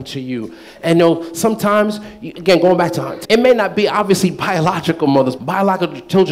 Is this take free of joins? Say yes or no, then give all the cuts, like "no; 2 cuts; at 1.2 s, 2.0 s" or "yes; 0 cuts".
no; 2 cuts; at 3.2 s, 5.4 s